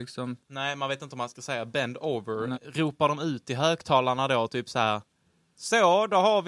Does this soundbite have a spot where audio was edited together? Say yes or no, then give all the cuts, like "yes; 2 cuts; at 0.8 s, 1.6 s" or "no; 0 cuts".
yes; 1 cut; at 2.5 s